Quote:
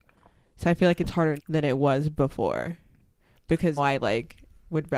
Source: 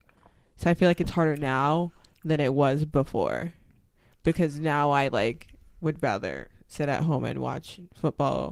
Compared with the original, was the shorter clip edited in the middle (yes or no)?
yes